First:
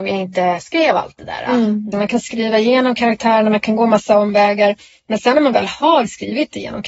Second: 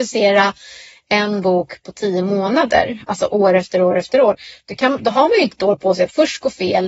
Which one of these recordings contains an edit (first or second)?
first